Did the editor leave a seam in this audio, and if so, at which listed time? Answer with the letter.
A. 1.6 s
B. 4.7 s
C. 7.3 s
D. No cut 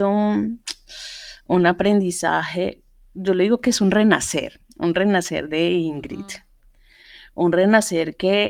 D